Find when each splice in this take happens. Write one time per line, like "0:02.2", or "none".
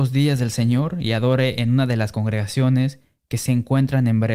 none